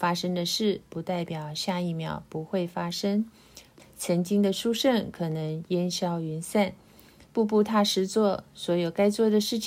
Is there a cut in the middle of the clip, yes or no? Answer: yes